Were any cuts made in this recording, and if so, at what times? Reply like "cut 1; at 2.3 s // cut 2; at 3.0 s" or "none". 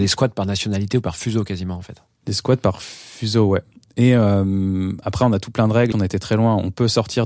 cut 1; at 5.9 s